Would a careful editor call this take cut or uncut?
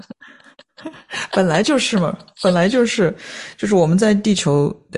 uncut